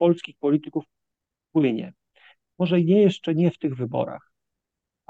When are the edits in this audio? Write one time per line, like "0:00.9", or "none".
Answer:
0:02.4

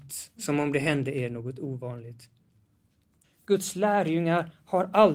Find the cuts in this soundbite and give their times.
0:03.2

